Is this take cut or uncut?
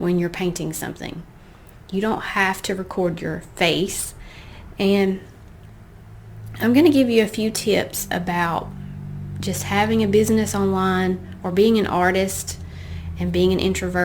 cut